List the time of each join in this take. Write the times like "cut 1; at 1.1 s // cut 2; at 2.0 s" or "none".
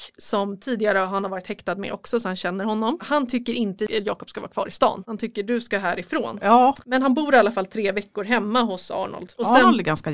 none